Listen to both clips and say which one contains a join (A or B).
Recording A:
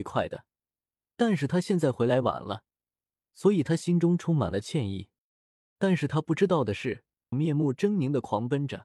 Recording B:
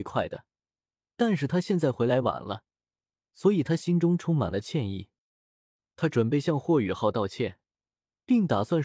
A